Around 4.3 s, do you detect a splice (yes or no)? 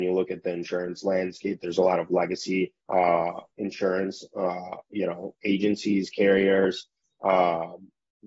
no